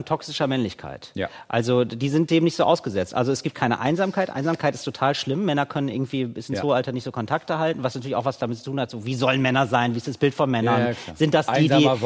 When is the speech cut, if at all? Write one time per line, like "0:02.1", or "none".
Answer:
none

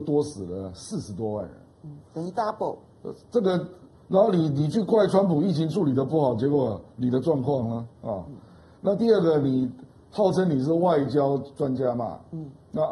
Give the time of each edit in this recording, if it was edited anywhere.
0:02.0

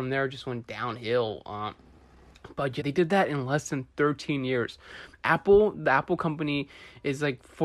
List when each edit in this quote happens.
0:02.8

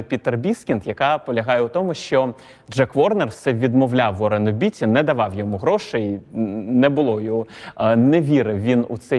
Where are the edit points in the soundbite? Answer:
none

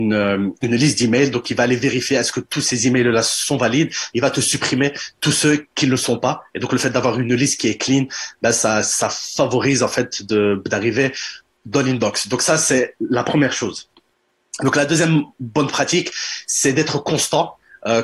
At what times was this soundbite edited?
none

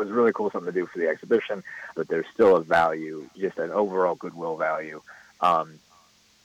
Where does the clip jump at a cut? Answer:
0:01.9

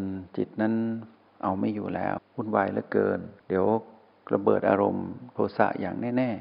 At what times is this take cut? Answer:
0:02.2
0:03.4

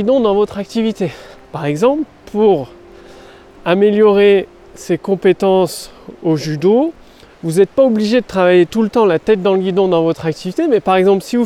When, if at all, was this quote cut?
0:07.3

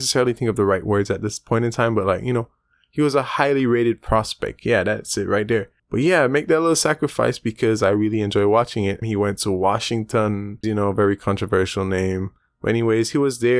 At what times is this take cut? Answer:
0:05.8
0:09.0
0:10.6

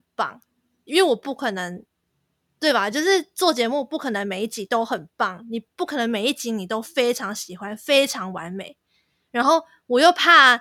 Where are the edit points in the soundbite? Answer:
none

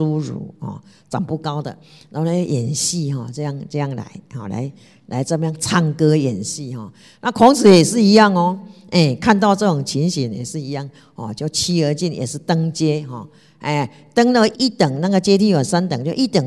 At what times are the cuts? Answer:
0:14.5

